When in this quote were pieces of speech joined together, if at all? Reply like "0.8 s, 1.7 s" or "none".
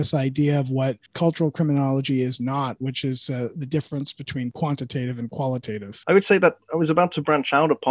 6.0 s